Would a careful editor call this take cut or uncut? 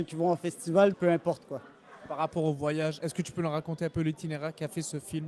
cut